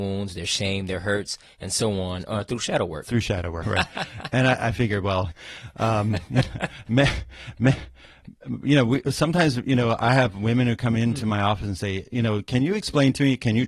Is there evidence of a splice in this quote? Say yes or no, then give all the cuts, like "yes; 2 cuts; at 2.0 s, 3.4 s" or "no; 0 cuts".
yes; 2 cuts; at 3.6 s, 5.3 s